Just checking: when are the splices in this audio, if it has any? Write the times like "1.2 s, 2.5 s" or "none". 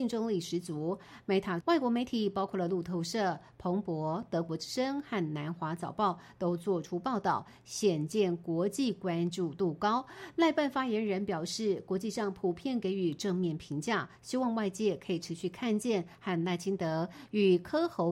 1.6 s